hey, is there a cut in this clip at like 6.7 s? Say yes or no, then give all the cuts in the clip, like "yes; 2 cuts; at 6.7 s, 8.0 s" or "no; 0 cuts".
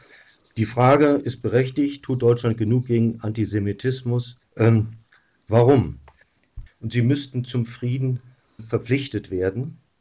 yes; 3 cuts; at 4.4 s, 6.7 s, 8.6 s